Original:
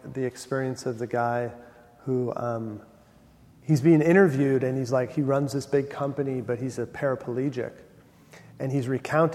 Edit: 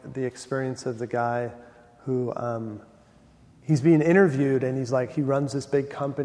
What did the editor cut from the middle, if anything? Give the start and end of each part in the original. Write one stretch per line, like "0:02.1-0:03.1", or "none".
none